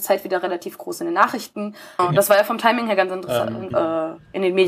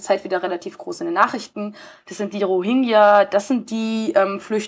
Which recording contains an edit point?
first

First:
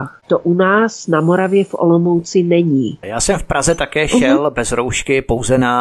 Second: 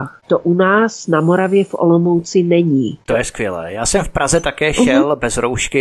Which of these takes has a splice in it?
first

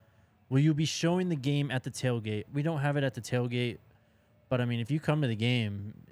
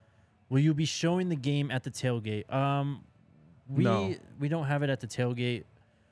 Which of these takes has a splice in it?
first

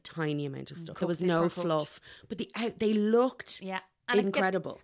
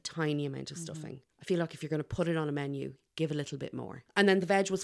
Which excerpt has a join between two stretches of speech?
first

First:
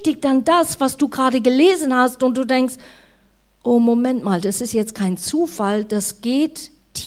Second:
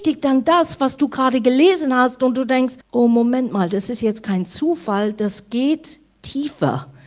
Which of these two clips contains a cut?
second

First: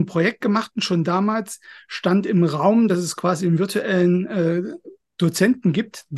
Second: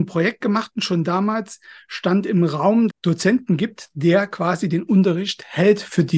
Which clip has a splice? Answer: second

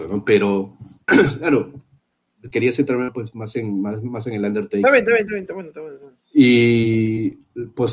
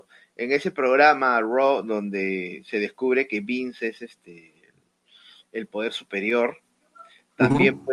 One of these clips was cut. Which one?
first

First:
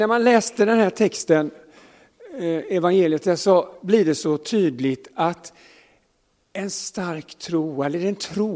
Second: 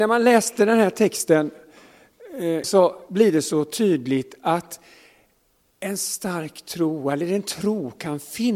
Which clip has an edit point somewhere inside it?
second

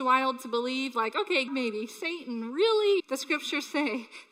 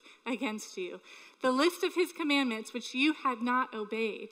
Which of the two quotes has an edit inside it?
first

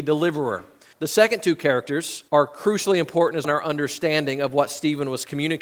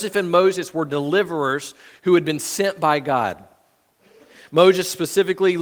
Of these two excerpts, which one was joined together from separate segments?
first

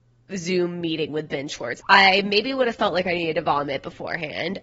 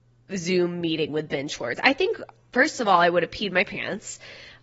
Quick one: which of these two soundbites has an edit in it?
first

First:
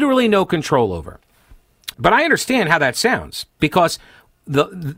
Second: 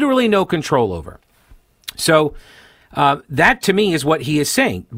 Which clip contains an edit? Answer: first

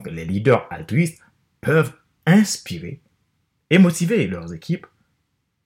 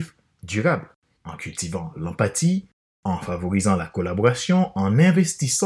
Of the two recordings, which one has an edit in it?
second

